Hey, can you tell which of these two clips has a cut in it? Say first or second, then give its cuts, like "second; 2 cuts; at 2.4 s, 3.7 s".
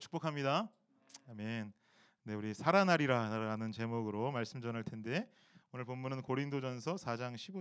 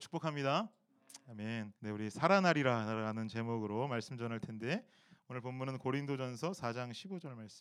second; 1 cut; at 1.8 s